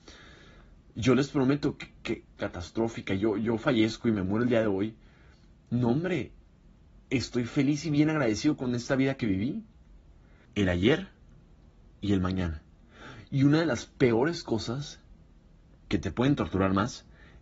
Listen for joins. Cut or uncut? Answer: cut